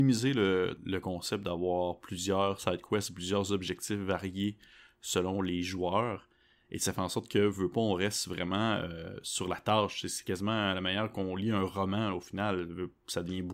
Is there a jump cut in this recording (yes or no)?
no